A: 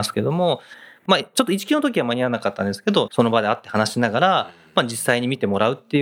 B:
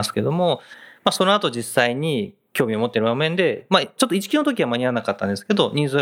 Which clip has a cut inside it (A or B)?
A